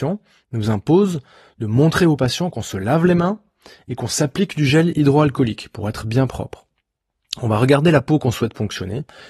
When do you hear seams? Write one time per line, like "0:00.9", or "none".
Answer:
none